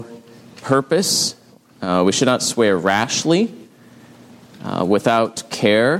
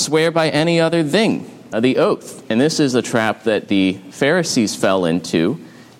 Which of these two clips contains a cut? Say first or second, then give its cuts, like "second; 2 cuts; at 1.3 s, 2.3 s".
second; 1 cut; at 1.7 s